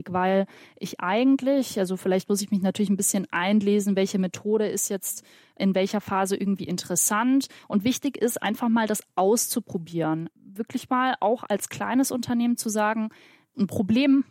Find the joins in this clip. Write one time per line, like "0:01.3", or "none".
0:07.6